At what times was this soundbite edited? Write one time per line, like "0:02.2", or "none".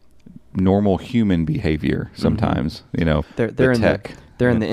0:03.2

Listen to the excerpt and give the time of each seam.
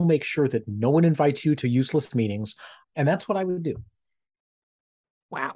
0:02.8

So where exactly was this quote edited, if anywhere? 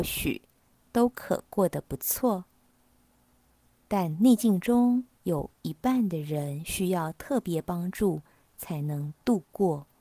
0:05.1

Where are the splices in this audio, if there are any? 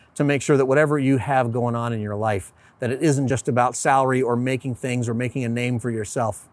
none

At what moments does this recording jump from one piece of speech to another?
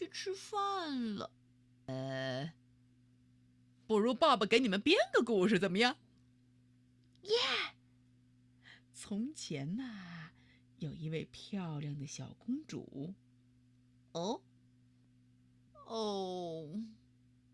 0:15.7

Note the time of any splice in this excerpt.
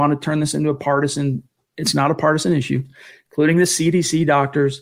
none

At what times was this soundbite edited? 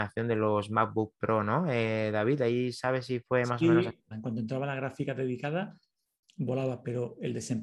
0:04.1

